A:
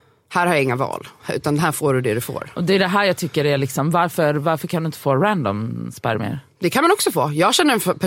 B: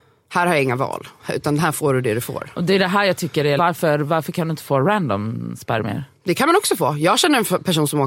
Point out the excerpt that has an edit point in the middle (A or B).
B